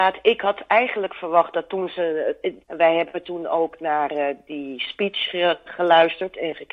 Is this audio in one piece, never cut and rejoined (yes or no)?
no